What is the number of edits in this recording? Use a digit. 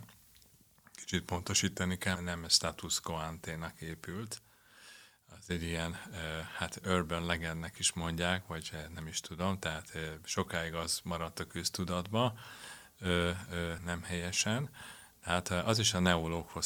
2